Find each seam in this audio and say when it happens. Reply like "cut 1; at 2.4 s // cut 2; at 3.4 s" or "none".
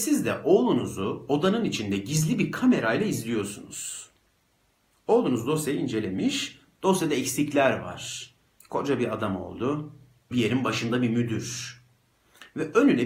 cut 1; at 8.6 s // cut 2; at 10.3 s